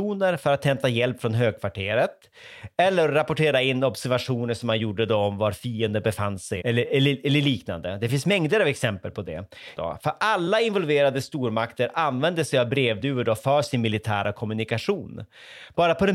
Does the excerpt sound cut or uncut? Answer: cut